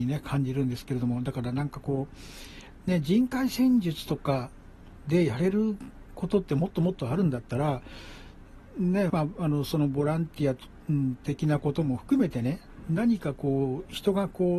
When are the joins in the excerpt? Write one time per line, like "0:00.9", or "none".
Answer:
0:09.1